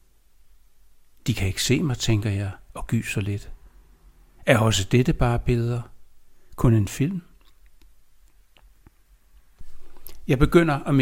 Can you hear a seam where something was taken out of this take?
no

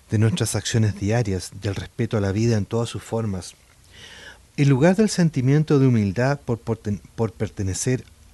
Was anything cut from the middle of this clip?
yes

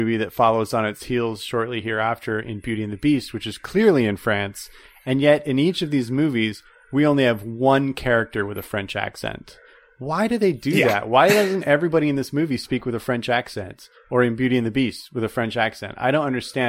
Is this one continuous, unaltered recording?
yes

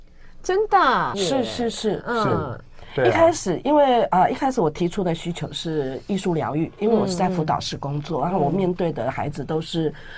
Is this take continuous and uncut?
no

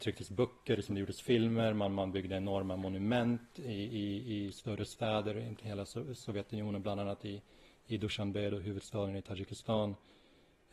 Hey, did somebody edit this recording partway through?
no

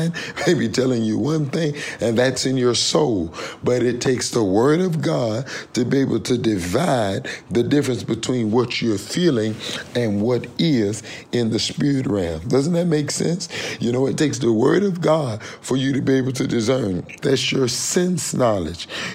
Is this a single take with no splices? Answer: no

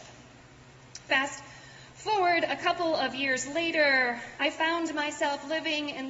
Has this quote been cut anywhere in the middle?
yes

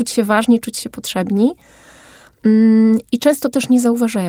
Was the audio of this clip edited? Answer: no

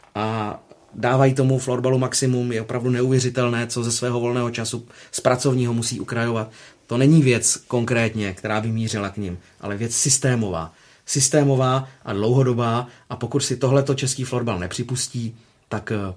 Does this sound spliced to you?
no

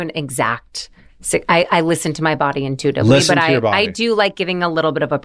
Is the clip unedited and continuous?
yes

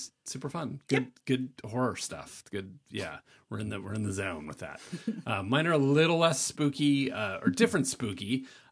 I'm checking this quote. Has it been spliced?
no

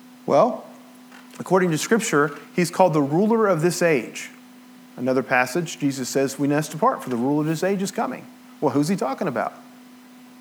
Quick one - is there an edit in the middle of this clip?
no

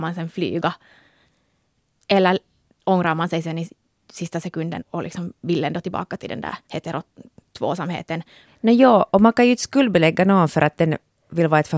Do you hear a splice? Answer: yes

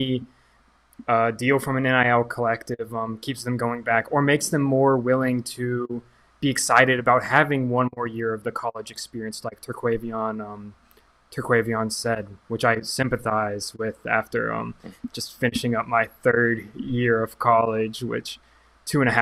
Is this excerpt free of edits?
yes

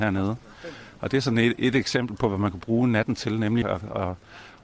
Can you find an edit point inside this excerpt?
yes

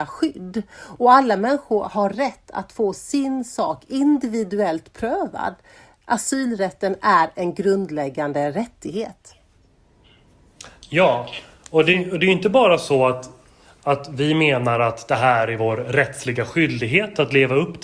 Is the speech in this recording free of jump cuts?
yes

